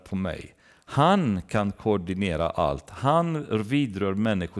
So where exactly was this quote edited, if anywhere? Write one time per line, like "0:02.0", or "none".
none